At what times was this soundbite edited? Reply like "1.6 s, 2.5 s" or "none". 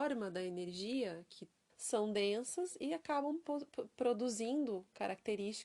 1.7 s

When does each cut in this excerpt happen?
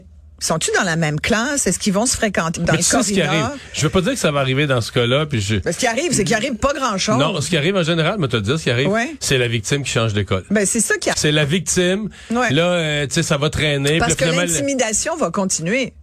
2.6 s, 11.1 s

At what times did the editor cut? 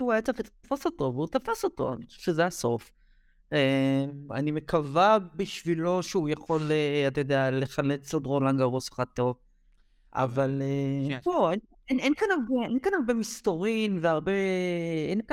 none

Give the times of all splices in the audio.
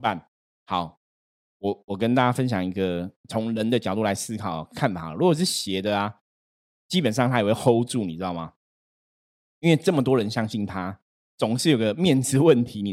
none

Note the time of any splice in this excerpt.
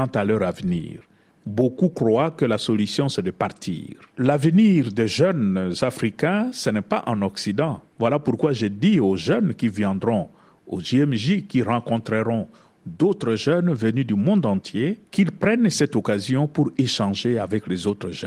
7.9 s, 15.1 s

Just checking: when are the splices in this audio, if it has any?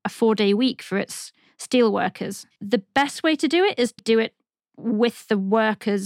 2.5 s, 4.0 s

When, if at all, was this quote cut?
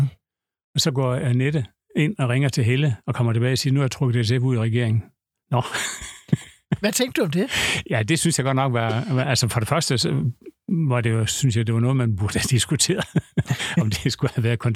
none

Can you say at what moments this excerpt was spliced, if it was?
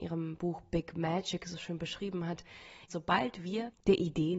2.9 s

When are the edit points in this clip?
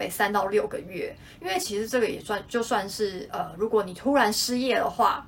none

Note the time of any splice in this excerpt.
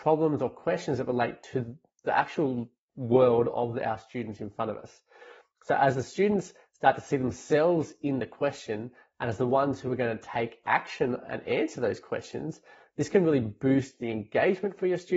none

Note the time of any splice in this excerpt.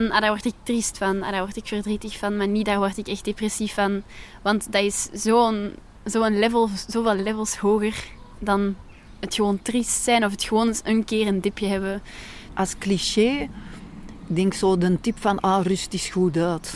none

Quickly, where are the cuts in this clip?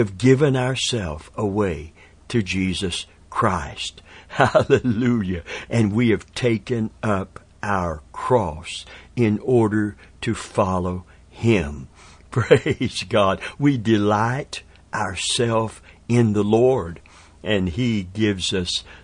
5.7 s

